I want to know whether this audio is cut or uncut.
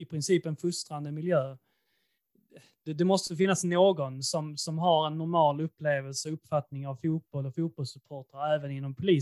uncut